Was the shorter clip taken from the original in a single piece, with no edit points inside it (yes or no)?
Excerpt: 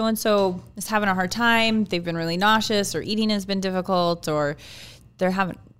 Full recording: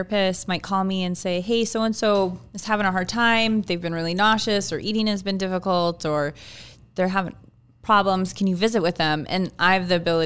yes